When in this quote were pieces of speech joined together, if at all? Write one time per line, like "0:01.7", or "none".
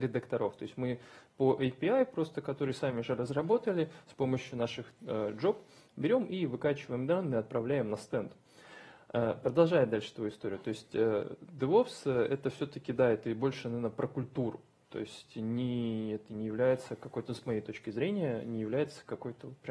none